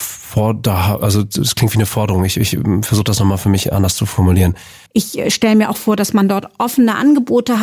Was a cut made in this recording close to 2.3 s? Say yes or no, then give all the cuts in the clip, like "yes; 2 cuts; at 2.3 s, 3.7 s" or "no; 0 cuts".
no; 1 cut; at 4.9 s